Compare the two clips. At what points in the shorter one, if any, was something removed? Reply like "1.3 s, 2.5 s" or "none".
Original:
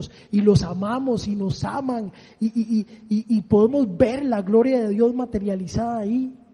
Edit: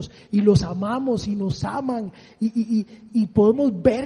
3.1 s